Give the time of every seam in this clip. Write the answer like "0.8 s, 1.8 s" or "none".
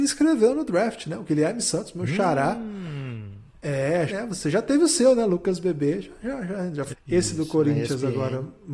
4.1 s, 6.9 s